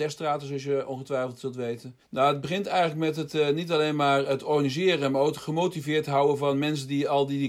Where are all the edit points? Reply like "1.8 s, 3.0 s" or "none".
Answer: 2.1 s